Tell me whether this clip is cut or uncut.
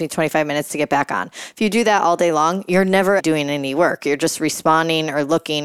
cut